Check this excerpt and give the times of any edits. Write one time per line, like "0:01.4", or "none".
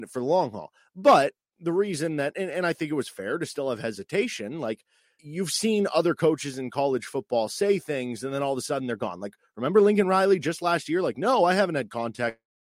0:05.2

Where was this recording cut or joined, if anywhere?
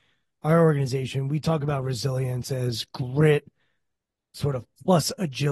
none

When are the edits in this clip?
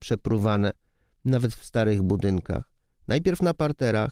none

